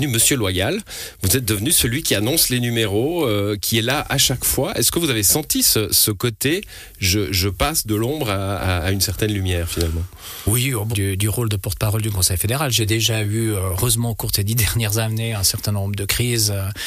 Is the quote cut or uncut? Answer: cut